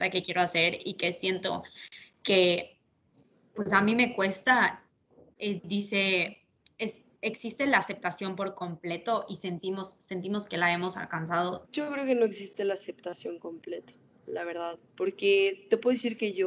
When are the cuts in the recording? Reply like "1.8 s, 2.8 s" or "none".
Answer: 11.6 s, 14.9 s